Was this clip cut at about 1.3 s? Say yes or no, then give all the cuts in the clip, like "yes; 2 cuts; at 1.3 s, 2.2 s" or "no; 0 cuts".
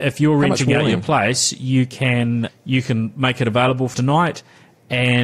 no; 2 cuts; at 2.5 s, 3.9 s